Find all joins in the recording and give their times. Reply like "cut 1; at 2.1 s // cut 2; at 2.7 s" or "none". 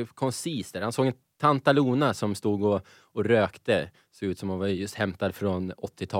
none